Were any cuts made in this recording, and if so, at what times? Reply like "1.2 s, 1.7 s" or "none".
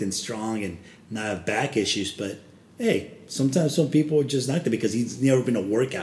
none